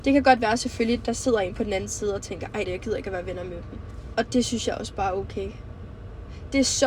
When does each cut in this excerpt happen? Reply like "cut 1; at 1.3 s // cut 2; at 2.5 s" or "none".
cut 1; at 2.6 s // cut 2; at 4.1 s